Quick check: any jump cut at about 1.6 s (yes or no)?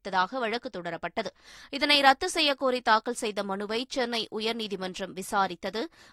no